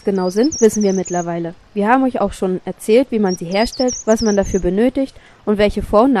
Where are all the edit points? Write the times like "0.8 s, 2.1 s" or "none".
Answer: none